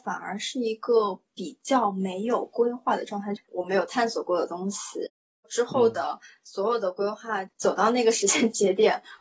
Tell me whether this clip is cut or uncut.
cut